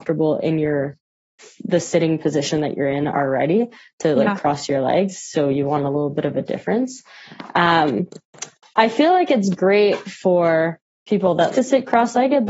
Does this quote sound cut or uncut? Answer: cut